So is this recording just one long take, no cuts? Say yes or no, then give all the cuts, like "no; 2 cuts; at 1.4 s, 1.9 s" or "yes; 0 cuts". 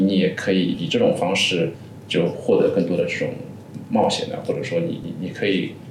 yes; 0 cuts